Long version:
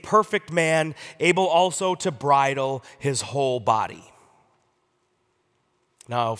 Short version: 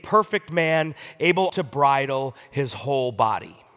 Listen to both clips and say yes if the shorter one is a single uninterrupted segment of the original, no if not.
no